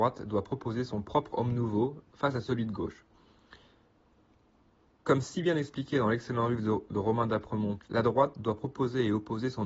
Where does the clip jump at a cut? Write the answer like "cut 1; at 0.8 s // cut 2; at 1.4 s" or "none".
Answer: cut 1; at 7.8 s